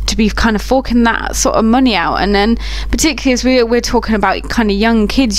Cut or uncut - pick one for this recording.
uncut